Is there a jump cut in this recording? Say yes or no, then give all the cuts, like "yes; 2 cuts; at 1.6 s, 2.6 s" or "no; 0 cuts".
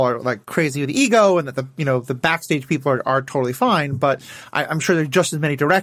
no; 0 cuts